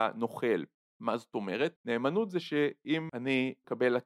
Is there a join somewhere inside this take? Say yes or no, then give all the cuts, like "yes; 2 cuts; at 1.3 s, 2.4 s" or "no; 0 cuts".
yes; 1 cut; at 1.7 s